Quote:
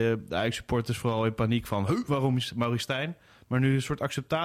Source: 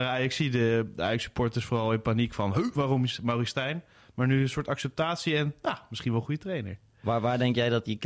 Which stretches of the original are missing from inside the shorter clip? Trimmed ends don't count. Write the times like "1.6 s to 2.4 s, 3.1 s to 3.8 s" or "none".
none